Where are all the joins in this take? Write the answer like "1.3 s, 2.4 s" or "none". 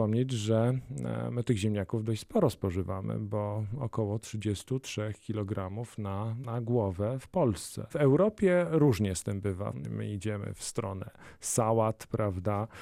9.8 s